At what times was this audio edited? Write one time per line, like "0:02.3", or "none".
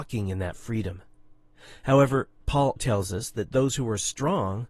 0:02.8